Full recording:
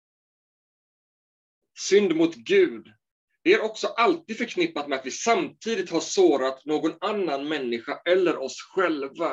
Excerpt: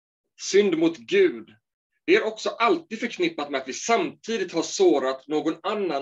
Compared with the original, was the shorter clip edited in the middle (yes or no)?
no